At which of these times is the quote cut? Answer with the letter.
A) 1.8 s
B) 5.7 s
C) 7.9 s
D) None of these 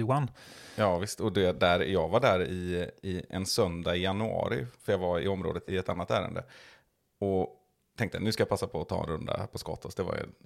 B